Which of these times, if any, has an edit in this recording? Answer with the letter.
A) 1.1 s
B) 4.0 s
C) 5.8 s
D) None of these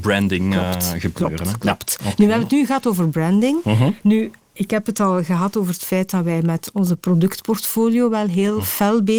D